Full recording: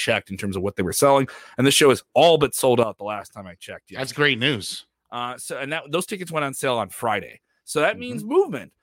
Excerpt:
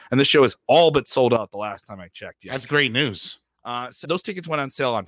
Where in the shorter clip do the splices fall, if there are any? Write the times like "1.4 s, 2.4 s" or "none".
4.0 s